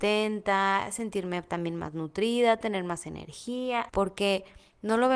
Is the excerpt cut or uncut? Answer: cut